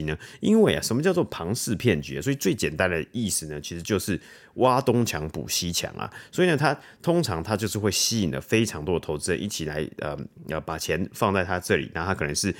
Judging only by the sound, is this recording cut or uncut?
uncut